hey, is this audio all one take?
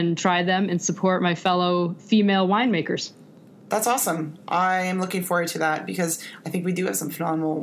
yes; 0 cuts

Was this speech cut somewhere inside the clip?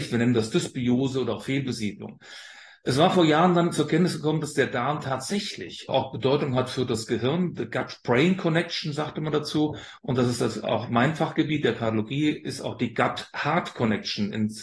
yes; 2 cuts; at 5.9 s, 10.0 s

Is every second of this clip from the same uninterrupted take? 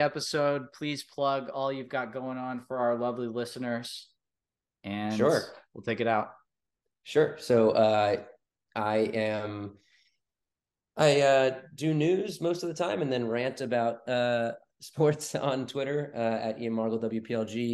yes; 0 cuts

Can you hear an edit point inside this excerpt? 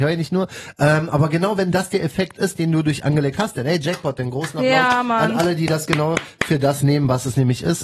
no; 0 cuts

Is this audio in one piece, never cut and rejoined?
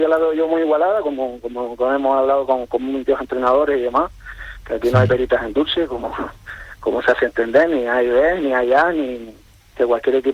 yes; 0 cuts

